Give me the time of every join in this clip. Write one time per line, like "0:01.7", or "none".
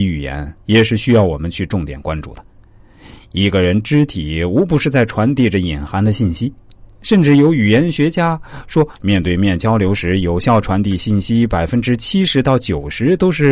none